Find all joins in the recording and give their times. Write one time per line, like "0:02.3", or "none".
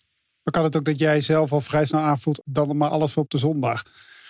0:02.4